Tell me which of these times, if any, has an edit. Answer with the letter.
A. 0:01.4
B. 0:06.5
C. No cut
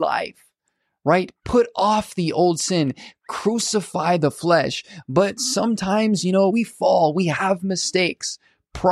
B